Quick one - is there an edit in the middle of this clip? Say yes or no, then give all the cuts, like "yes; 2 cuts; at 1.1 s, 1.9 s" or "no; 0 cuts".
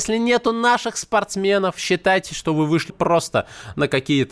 yes; 1 cut; at 2.9 s